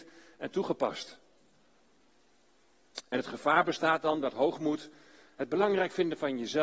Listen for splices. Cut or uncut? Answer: uncut